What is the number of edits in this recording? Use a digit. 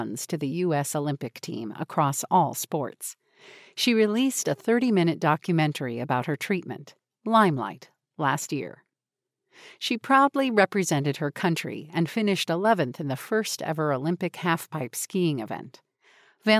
0